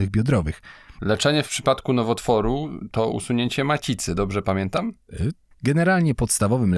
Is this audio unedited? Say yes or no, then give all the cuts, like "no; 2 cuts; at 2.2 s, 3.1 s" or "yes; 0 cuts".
no; 2 cuts; at 1.0 s, 5.5 s